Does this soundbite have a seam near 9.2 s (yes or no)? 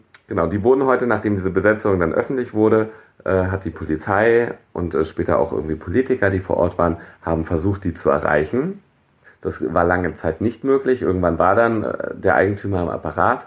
yes